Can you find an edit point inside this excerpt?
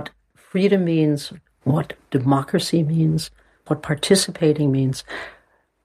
yes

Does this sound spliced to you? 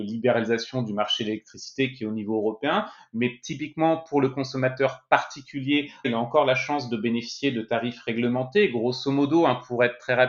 yes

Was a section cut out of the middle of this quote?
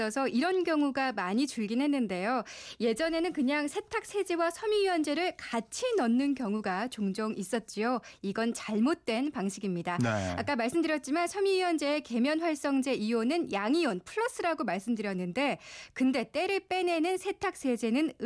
no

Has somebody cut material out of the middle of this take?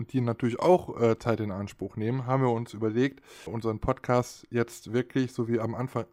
yes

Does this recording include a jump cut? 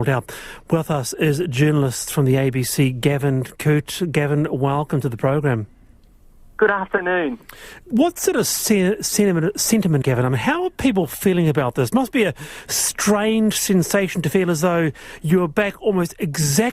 yes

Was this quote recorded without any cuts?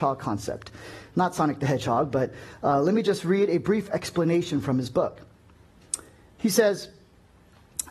yes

